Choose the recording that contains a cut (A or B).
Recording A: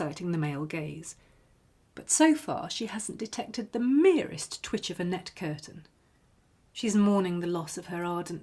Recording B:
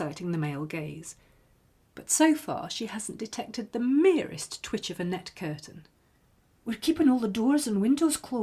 B